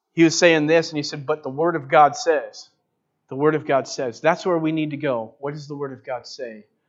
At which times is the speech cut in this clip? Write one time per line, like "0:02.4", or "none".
none

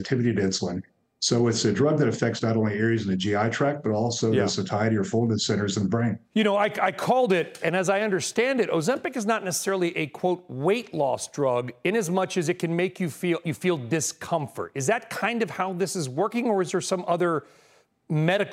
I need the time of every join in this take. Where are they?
0:06.2
0:07.6
0:13.4

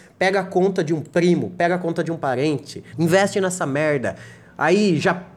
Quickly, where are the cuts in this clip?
0:02.9

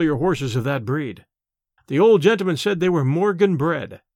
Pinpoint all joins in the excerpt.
0:01.8

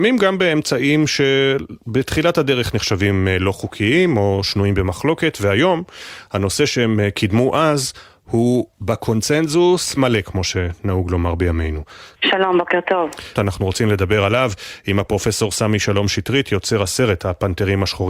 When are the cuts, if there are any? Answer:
0:10.0
0:12.2
0:13.4

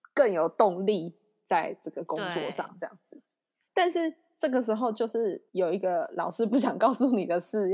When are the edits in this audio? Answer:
0:03.7
0:05.5

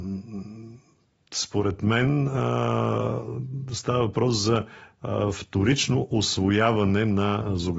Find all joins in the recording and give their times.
none

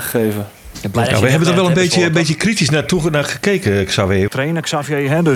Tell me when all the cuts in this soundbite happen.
0:04.3

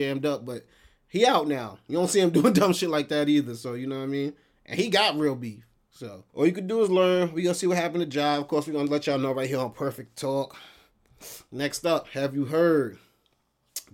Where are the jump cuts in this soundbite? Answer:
0:06.3

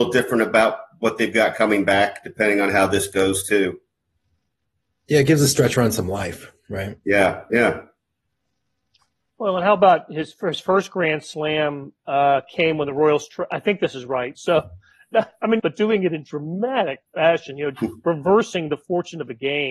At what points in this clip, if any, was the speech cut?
0:14.4
0:15.6

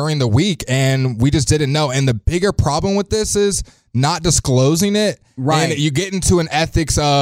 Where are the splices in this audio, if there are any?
none

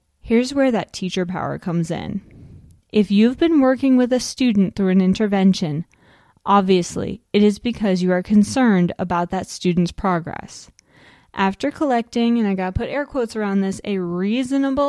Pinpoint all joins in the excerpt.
none

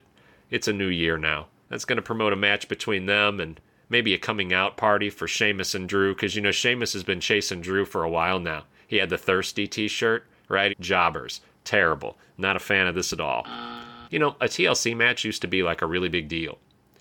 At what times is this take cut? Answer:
0:01.6
0:10.7
0:14.0

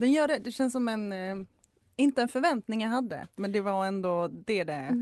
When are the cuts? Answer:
none

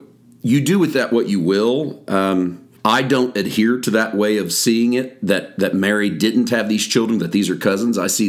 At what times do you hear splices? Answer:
0:02.8

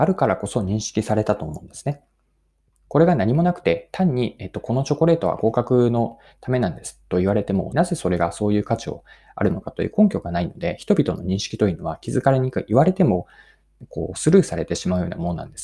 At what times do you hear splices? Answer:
0:07.7

